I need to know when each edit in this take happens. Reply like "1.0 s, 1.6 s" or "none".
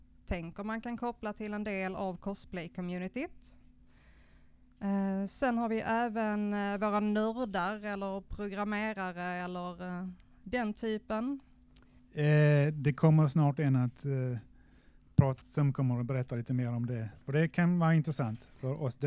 12.0 s, 15.4 s